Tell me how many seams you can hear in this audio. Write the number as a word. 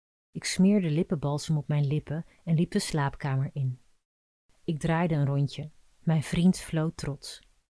zero